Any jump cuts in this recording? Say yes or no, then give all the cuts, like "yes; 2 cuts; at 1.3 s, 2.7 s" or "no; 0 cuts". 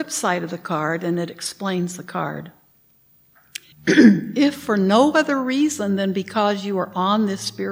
yes; 1 cut; at 3.7 s